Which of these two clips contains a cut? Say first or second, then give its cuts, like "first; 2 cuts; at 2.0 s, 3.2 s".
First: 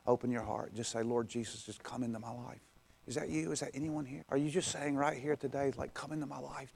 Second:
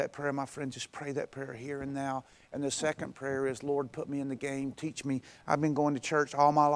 first; 1 cut; at 4.2 s